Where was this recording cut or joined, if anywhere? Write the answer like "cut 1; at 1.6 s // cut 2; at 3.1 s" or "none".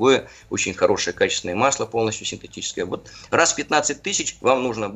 none